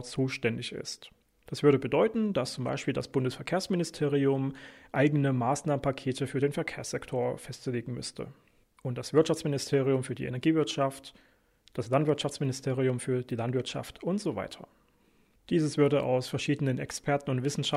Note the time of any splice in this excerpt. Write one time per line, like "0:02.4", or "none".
0:15.4